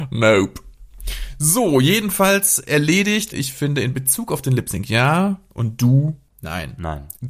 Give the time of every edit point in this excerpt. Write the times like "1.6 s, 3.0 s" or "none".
3.3 s